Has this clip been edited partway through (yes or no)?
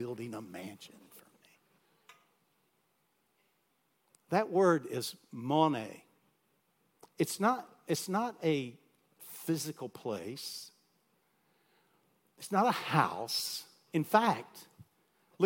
yes